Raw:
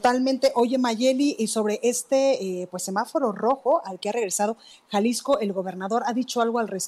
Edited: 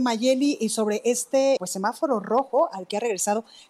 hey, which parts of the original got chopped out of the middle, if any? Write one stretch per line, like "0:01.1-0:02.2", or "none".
0:02.3-0:02.7